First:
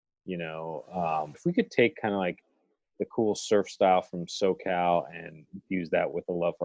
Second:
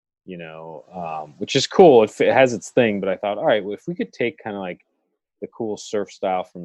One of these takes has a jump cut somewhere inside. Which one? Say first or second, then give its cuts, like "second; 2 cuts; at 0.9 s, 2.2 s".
first; 1 cut; at 1.3 s